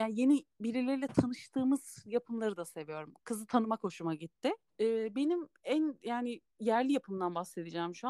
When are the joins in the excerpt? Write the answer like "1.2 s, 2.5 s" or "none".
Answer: 4.7 s